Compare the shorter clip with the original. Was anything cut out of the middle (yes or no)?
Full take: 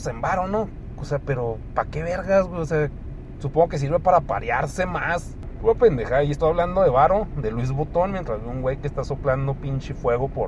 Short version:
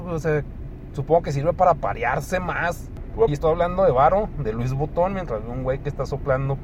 yes